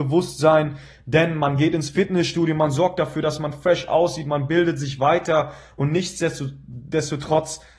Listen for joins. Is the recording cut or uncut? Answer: uncut